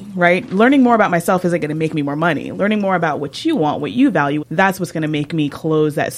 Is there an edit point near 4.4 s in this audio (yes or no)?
yes